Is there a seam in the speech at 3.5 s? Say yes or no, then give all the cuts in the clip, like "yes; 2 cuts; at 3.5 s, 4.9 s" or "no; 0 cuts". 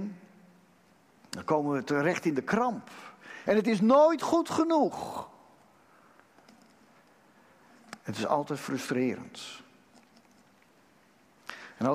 yes; 1 cut; at 3.5 s